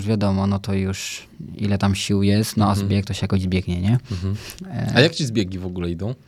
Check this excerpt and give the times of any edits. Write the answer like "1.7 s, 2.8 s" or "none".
none